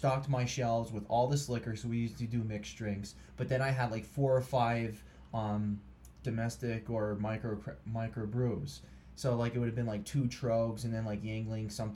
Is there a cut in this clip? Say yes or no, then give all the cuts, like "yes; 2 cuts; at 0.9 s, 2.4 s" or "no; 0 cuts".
no; 0 cuts